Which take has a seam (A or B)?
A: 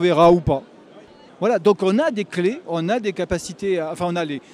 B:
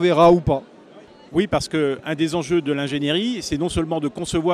A